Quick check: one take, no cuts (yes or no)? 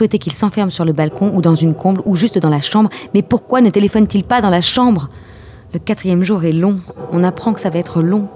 yes